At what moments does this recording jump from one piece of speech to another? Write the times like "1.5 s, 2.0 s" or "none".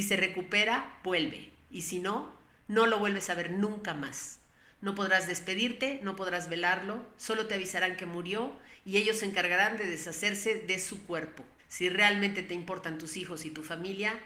11.6 s